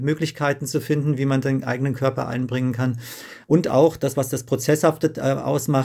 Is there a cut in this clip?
yes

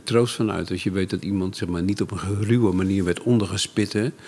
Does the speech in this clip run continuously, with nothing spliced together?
yes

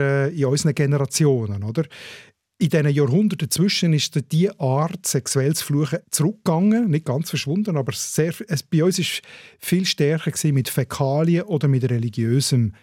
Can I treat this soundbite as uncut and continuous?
yes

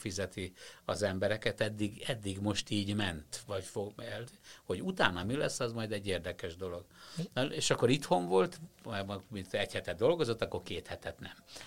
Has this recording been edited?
no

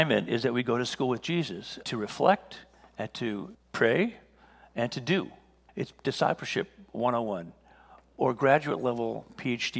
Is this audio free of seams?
no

